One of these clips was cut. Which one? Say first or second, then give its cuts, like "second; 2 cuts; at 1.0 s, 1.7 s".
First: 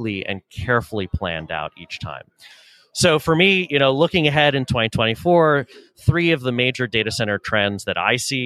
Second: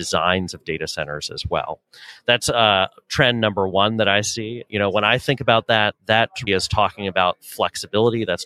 second; 2 cuts; at 4.7 s, 6.5 s